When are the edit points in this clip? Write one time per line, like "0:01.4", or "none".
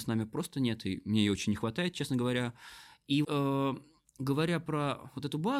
0:03.2